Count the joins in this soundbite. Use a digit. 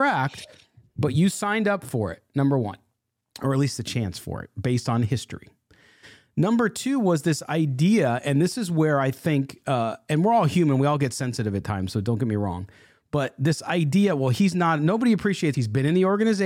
1